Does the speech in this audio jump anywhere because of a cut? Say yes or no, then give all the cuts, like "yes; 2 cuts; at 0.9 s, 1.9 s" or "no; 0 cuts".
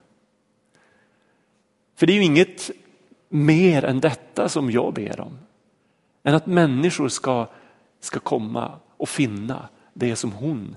no; 0 cuts